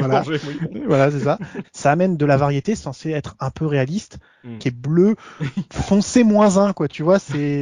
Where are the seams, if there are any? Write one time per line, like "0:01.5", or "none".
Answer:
0:01.6
0:04.6

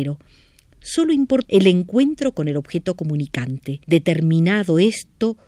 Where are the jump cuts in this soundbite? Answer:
0:01.4
0:03.8

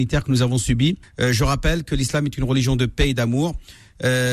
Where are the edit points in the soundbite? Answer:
0:01.0

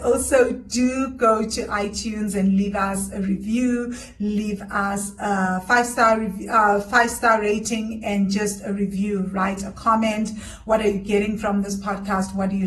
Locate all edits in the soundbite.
none

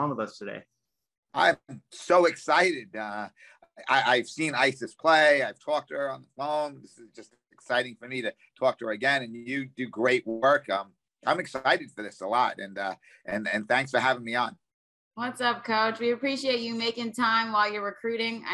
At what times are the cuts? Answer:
none

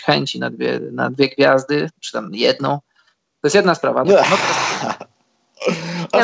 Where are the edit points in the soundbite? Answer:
0:04.0

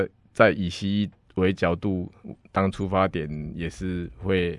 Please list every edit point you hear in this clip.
none

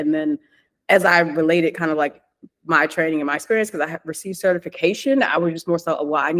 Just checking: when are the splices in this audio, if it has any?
none

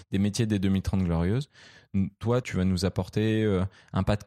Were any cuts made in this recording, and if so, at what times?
0:02.4

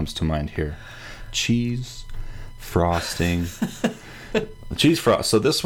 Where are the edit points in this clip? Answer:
none

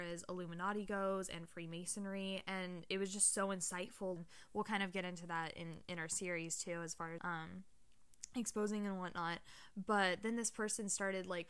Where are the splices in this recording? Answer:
0:04.2
0:07.2

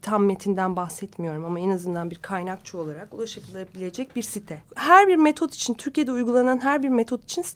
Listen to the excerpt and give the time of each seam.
0:04.6

